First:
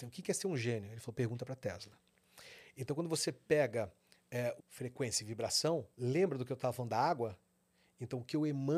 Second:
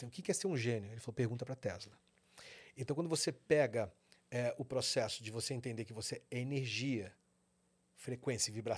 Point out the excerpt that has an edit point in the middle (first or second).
first